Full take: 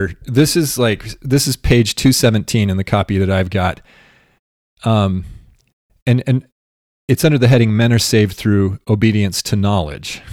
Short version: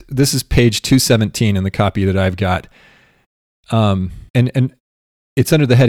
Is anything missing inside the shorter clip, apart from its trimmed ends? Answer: yes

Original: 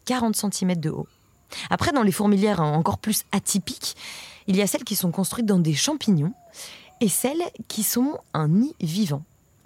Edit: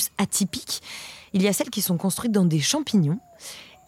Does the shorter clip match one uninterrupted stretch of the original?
yes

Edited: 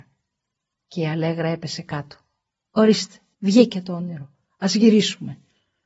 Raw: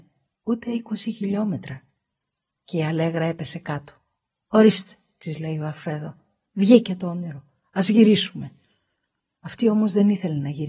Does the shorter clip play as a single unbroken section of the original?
no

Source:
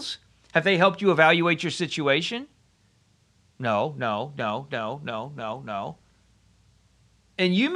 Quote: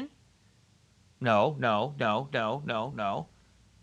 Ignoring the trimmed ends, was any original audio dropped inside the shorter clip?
yes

